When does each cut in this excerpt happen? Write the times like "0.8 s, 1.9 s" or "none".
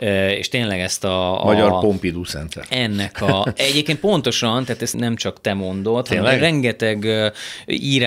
4.9 s